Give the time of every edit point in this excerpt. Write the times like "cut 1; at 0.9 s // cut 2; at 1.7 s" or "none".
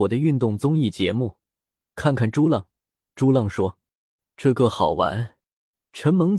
none